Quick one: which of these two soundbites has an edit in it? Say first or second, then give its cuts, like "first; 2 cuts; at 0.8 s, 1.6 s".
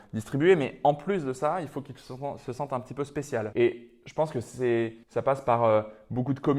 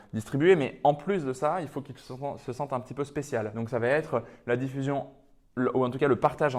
first; 2 cuts; at 3.5 s, 5.0 s